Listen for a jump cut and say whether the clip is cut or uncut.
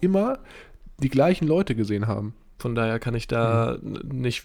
cut